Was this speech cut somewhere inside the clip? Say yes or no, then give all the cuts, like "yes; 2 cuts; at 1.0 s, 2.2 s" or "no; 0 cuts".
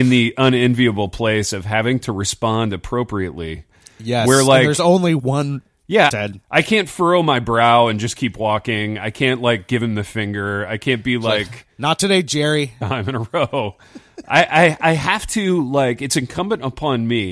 yes; 2 cuts; at 6.1 s, 12.8 s